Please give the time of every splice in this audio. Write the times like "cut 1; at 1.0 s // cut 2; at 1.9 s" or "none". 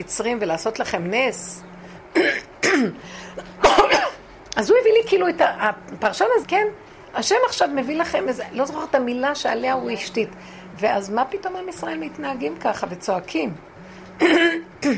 cut 1; at 6.4 s